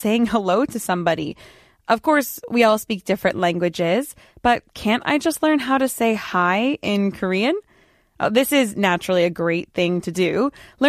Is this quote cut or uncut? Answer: uncut